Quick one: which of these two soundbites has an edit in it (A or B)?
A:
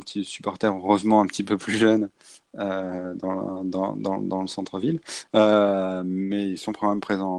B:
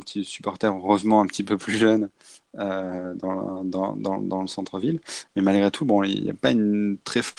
A